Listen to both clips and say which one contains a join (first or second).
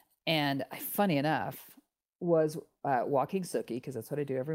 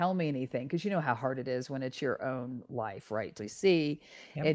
second